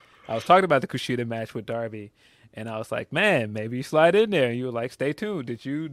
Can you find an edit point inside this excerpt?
no; 0 cuts

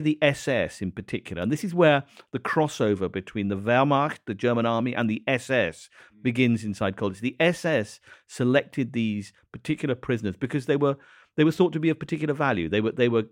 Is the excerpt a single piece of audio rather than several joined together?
yes; 0 cuts

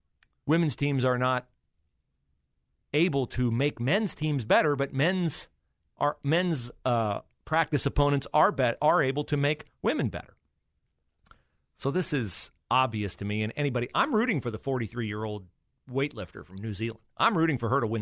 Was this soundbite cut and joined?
no; 0 cuts

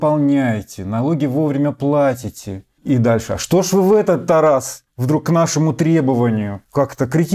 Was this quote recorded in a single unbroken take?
yes; 0 cuts

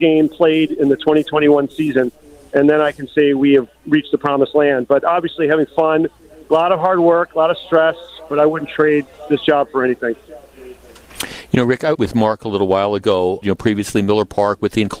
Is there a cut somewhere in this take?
yes; 2 cuts; at 12.0 s, 13.4 s

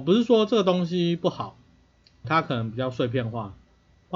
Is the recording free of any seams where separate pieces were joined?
no; 1 cut; at 2.2 s

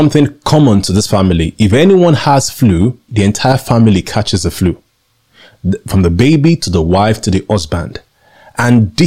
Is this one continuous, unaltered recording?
no; 1 cut; at 3.1 s

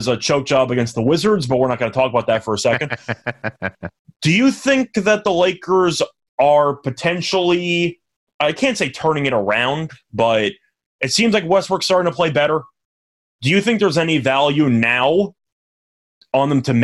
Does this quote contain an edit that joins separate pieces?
no; 0 cuts

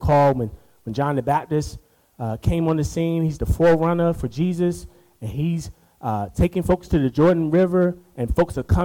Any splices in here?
no; 0 cuts

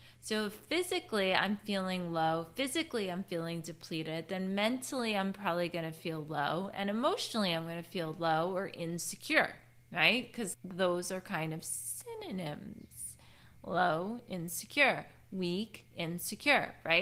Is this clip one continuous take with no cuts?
no; 1 cut; at 10.5 s

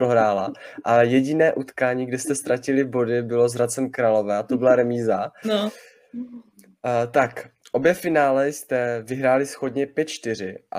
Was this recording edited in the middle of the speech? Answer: yes; 1 cut; at 5.4 s

